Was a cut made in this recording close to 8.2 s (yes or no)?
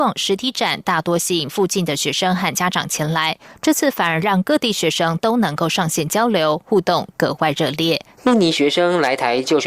yes